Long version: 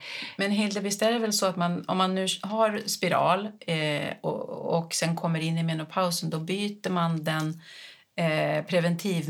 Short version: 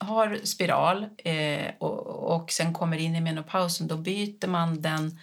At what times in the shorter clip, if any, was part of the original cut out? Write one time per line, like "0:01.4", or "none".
none